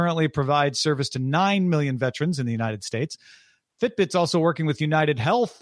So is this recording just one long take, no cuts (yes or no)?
yes